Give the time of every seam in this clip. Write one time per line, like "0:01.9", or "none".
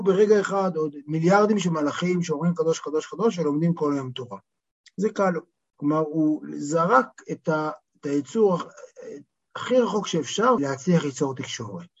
0:05.7
0:07.9
0:10.6

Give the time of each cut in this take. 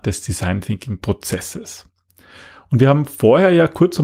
none

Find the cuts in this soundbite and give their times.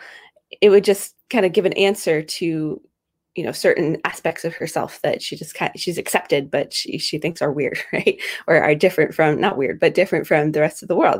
0:05.2
0:09.8

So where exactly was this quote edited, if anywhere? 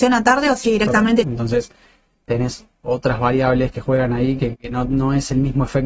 0:01.2
0:04.5

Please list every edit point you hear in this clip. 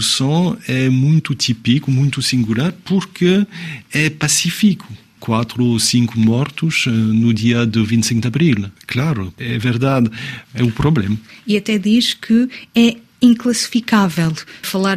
0:08.8
0:10.4

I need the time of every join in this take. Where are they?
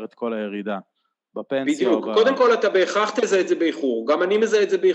none

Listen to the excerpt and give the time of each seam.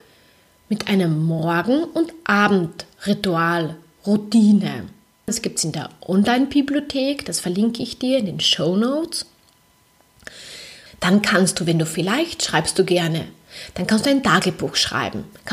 0:05.3
0:10.9

